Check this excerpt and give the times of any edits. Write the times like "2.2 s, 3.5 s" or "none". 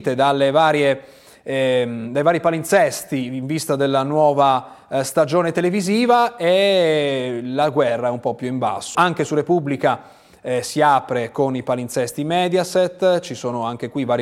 8.9 s